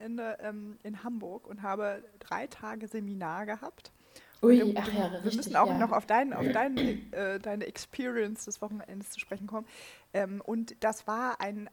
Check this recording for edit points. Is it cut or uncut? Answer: uncut